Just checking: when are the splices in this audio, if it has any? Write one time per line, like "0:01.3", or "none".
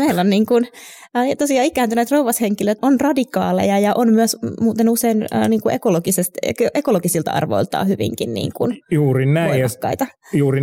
0:02.8